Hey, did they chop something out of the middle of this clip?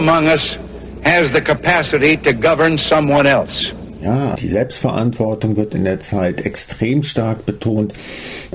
yes; 1 cut; at 4.4 s

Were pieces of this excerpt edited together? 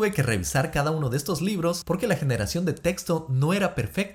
no; 0 cuts

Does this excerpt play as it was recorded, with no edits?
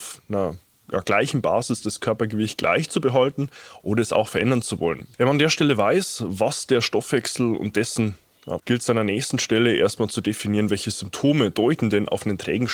no; 2 cuts; at 5.1 s, 8.6 s

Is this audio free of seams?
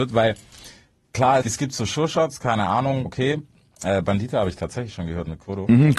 no; 2 cuts; at 1.4 s, 3.0 s

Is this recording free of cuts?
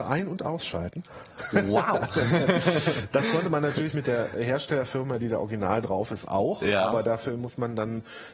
yes; 0 cuts

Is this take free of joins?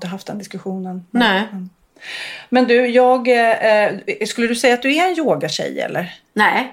yes; 0 cuts

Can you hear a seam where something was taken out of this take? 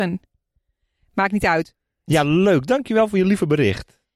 yes; 1 cut; at 2.1 s

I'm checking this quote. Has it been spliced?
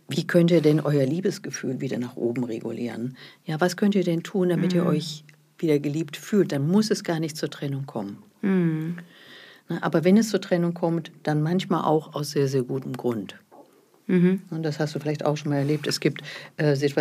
no; 0 cuts

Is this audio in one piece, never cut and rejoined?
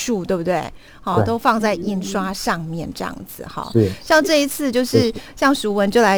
yes; 0 cuts

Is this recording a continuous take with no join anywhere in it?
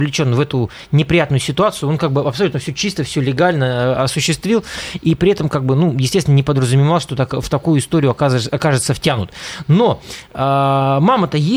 yes; 0 cuts

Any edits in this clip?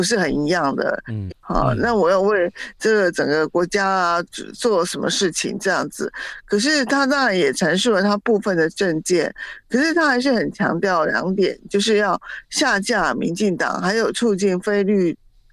yes; 1 cut; at 1.3 s

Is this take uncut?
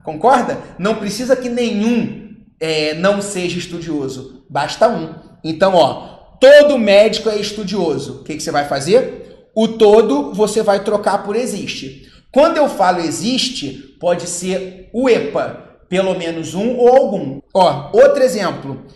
no; 1 cut; at 17.4 s

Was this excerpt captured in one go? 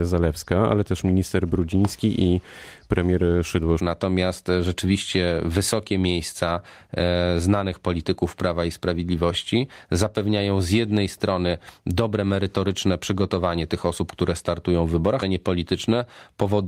no; 2 cuts; at 3.8 s, 15.2 s

